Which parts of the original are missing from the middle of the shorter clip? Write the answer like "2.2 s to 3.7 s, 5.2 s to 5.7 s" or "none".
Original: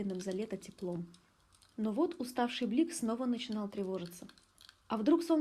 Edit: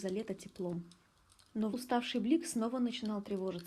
1.9 s to 2.2 s